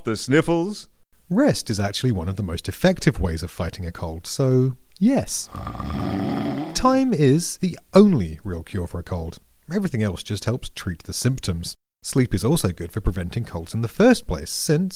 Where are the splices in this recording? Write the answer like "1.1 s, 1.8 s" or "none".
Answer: 7.6 s